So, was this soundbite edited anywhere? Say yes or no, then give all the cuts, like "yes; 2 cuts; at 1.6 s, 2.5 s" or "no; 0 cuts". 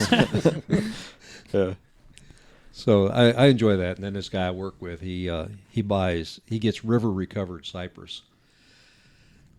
no; 0 cuts